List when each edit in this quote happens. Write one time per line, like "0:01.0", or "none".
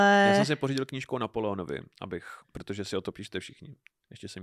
0:02.4